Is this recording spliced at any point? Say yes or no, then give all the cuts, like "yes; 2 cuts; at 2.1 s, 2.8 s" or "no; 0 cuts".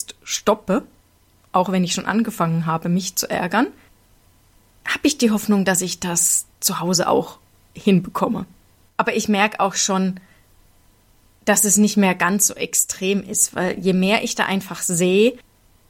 yes; 1 cut; at 8.9 s